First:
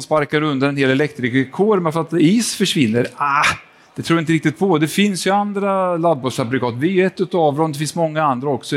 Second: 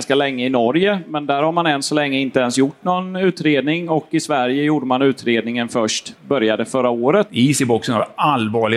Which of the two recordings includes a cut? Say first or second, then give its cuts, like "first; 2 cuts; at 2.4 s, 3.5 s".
second; 1 cut; at 7.3 s